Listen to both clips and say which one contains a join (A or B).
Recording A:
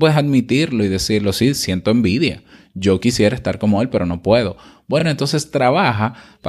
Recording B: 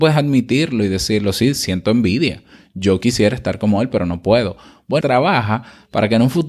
B